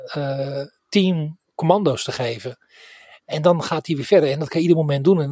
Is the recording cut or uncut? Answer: uncut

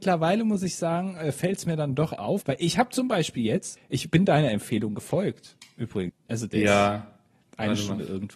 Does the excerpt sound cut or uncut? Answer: cut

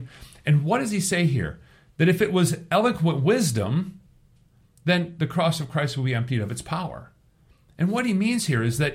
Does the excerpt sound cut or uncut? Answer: uncut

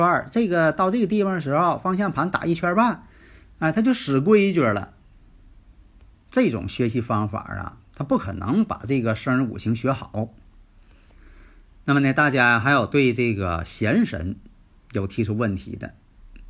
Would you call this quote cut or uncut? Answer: cut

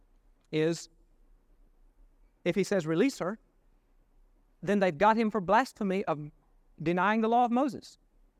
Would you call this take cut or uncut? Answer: uncut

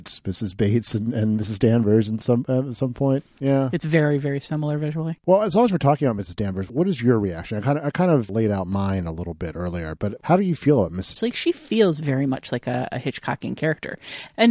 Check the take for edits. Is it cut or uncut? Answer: cut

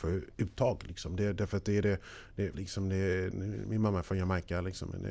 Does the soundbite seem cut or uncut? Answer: cut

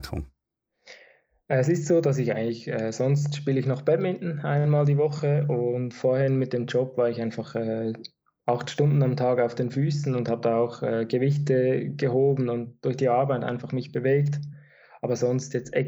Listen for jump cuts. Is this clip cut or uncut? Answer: uncut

